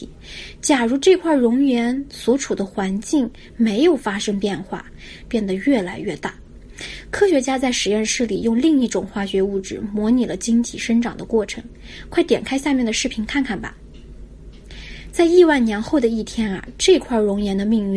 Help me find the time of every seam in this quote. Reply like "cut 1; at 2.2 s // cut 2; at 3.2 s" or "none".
cut 1; at 5.3 s